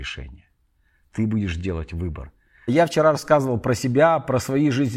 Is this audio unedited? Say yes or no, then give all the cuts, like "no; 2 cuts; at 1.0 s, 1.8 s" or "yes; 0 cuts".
no; 1 cut; at 2.7 s